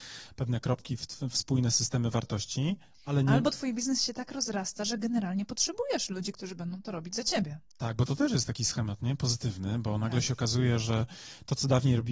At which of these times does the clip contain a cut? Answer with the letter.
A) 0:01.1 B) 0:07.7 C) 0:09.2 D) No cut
D